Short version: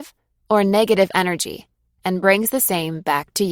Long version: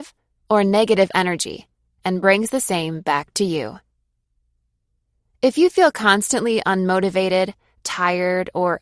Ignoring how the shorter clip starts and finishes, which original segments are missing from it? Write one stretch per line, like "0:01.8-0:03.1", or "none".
none